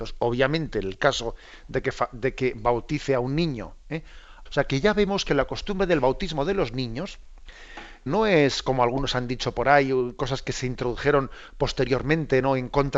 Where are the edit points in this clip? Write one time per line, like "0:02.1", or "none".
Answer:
0:04.5
0:08.1